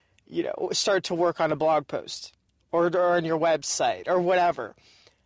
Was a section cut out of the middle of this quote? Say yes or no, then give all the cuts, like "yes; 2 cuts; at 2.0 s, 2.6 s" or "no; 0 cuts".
no; 0 cuts